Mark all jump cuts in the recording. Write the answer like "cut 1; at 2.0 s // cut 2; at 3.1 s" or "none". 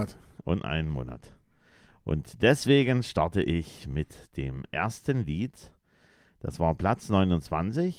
none